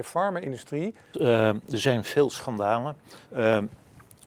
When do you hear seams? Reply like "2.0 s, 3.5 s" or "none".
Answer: 1.1 s, 3.3 s